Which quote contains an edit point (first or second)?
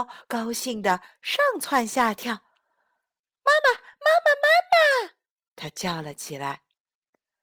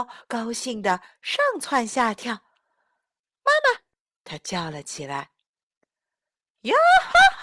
second